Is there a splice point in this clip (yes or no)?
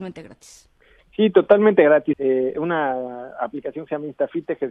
yes